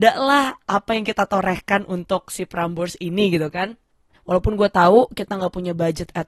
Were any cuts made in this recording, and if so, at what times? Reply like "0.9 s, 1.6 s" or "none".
4.1 s